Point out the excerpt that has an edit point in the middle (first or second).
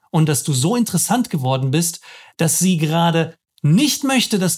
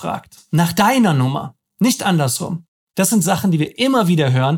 second